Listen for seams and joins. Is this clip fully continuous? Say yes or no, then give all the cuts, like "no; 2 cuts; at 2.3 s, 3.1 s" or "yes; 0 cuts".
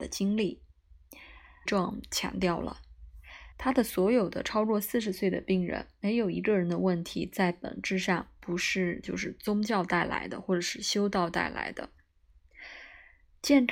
no; 2 cuts; at 1.7 s, 3.5 s